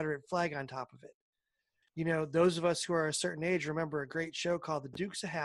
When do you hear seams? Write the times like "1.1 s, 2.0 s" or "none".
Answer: 1.8 s